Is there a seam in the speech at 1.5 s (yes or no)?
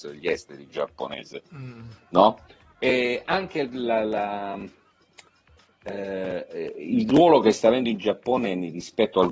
no